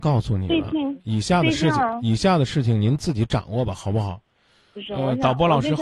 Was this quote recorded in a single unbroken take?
yes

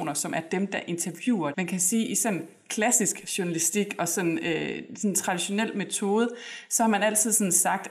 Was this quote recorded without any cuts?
no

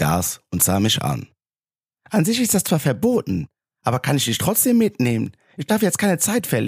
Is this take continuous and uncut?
yes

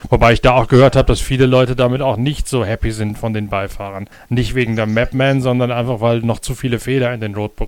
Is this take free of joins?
yes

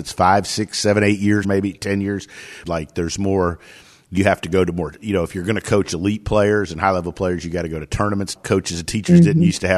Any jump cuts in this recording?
yes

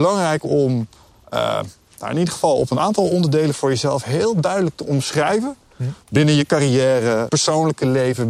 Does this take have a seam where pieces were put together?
yes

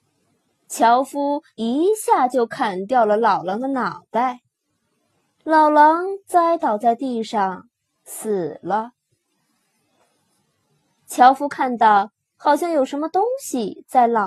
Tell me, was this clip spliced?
no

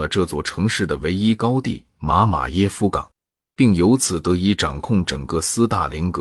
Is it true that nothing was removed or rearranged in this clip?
yes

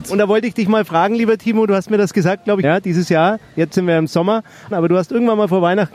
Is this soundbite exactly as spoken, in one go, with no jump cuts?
no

